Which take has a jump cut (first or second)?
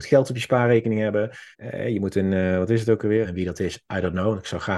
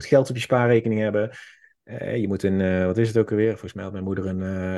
first